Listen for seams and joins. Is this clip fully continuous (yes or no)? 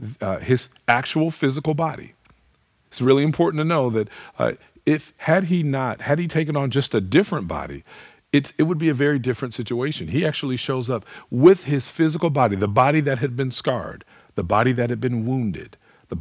yes